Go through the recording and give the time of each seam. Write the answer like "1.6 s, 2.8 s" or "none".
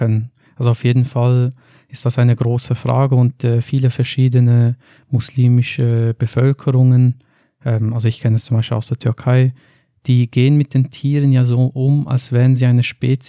none